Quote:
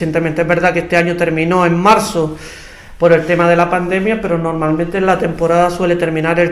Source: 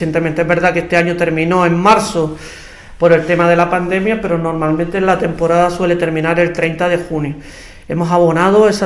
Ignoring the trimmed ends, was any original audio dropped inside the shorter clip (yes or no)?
no